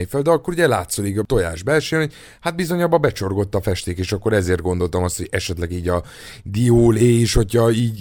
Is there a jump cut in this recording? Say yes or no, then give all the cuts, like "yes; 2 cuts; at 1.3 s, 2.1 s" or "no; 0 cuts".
no; 0 cuts